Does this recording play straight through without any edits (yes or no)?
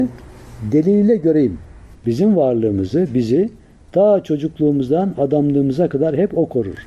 no